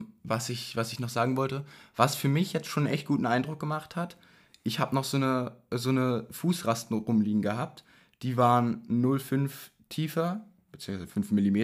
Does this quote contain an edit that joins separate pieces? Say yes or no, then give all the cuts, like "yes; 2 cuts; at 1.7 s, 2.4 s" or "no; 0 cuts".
yes; 1 cut; at 10.7 s